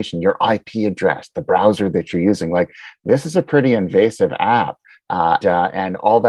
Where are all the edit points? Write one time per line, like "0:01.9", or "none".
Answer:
0:05.4